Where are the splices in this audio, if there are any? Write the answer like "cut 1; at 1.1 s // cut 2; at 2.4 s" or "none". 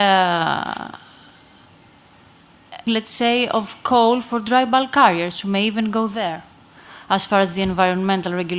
cut 1; at 2.9 s